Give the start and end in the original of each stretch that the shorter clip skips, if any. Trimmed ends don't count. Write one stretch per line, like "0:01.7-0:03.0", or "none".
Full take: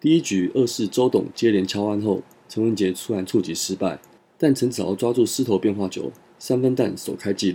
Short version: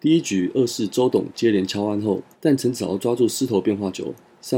0:02.3-0:04.3